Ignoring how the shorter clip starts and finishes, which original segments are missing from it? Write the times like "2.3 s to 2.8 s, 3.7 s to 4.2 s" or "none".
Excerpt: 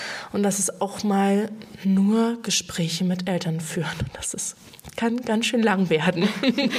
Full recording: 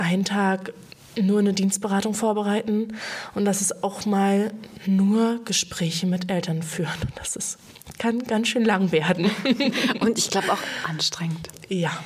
none